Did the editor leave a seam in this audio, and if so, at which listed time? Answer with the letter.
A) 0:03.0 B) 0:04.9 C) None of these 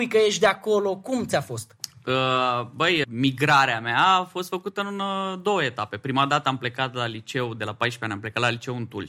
A